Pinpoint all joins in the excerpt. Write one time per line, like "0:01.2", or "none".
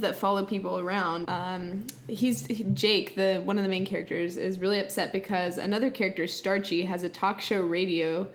0:01.2